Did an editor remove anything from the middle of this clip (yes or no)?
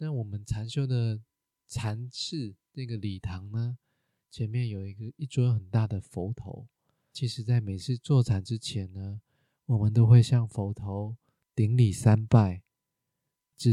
no